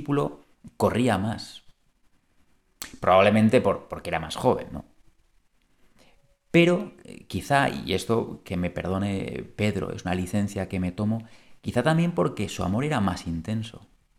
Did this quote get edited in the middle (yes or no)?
no